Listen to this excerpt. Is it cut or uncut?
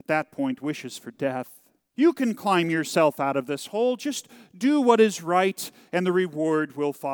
cut